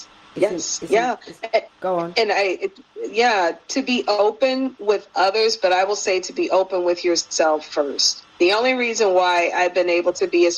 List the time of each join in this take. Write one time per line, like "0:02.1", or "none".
0:01.7
0:08.3